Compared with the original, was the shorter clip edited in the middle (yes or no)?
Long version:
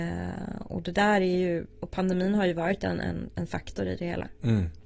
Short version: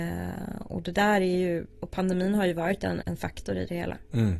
yes